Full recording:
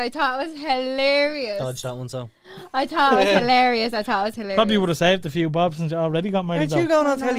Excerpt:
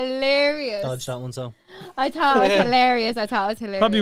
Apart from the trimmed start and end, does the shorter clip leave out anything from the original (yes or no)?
no